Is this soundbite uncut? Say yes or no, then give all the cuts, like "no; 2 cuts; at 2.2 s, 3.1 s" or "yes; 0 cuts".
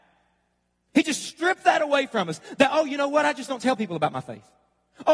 yes; 0 cuts